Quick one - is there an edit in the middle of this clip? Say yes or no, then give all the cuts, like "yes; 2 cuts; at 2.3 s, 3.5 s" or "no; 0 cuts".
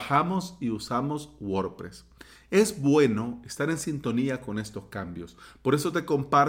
no; 0 cuts